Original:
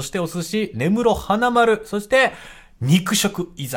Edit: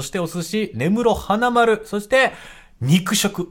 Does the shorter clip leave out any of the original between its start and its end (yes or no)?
no